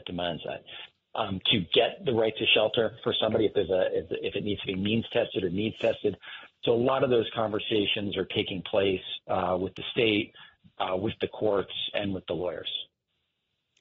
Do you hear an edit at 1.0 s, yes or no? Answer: yes